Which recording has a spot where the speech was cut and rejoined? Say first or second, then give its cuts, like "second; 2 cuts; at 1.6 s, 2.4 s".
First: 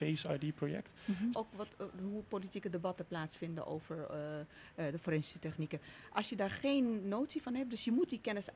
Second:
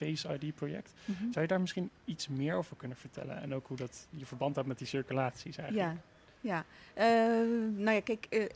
first; 1 cut; at 1.3 s